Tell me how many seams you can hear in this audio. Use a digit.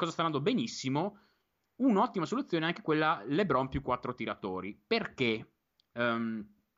0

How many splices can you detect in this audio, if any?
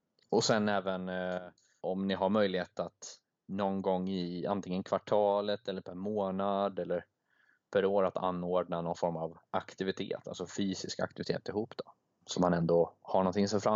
1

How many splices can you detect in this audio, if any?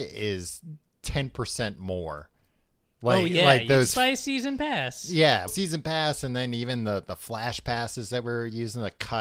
1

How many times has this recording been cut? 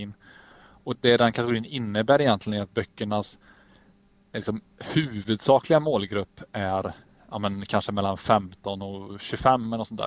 1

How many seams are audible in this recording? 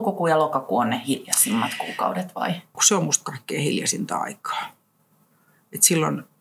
1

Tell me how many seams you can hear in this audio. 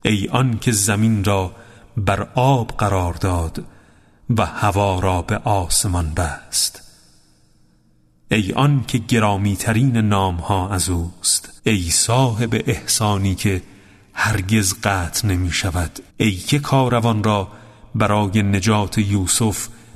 2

